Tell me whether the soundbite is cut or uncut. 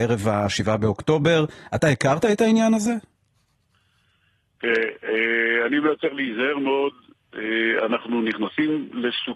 uncut